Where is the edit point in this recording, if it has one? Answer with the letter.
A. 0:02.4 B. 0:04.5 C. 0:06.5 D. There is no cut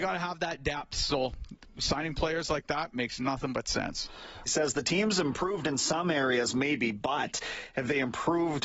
B